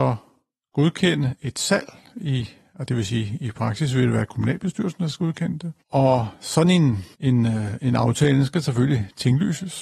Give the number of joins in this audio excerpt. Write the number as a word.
one